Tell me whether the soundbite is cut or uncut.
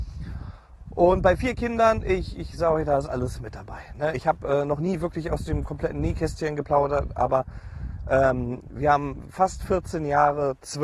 uncut